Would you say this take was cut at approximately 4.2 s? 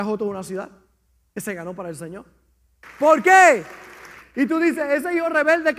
yes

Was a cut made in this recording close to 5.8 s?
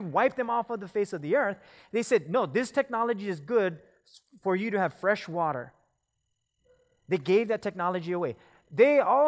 no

